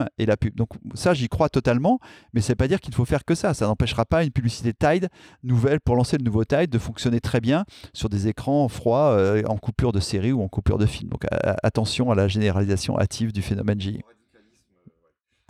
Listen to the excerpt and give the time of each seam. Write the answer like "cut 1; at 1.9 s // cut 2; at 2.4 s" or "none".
none

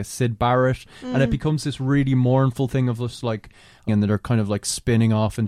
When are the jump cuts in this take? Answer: cut 1; at 3.9 s

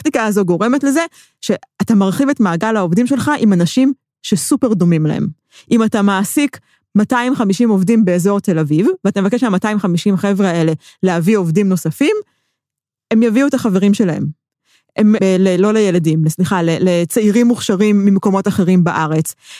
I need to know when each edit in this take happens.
cut 1; at 15.2 s

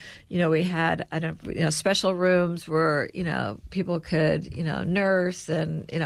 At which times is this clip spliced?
cut 1; at 1.4 s

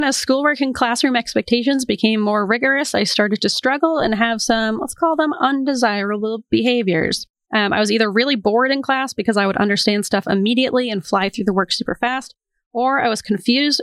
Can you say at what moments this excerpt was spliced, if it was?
none

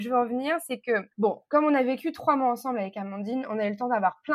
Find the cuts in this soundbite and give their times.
cut 1; at 1.1 s

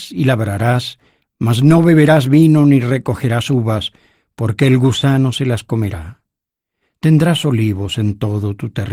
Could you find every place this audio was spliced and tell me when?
none

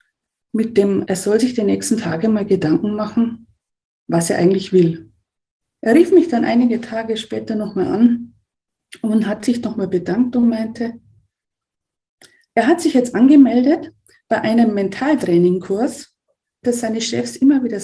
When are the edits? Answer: cut 1; at 1.0 s // cut 2; at 5.7 s // cut 3; at 16.6 s

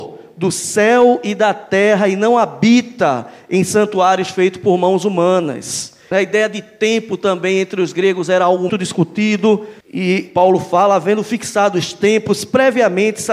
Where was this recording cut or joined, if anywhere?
cut 1; at 6.1 s // cut 2; at 8.7 s // cut 3; at 9.8 s

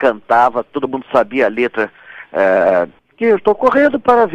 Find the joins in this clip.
cut 1; at 3.0 s

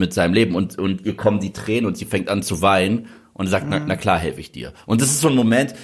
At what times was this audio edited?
none

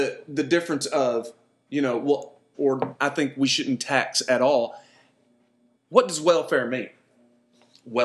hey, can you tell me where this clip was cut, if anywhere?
cut 1; at 2.5 s // cut 2; at 5.7 s

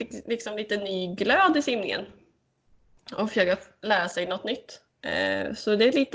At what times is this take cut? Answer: none

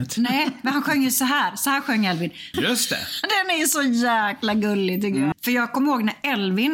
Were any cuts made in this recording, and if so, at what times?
cut 1; at 2.5 s // cut 2; at 5.3 s

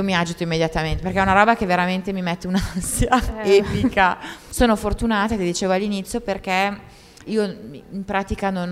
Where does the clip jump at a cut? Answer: cut 1; at 4.5 s // cut 2; at 7.3 s

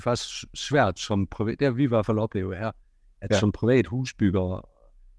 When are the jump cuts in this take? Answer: none

